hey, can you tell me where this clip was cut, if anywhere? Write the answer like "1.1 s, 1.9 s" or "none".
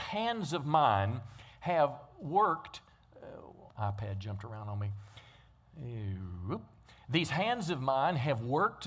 3.7 s